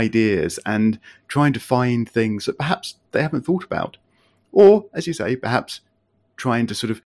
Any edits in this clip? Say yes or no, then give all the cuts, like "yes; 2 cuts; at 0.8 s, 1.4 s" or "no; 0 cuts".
no; 0 cuts